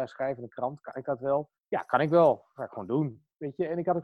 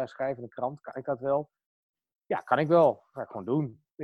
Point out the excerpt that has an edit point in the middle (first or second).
first